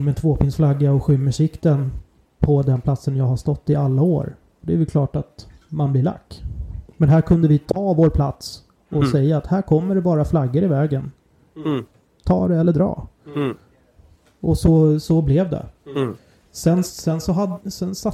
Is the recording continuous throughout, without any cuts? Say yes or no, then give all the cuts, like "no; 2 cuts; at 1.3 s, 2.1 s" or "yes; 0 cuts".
yes; 0 cuts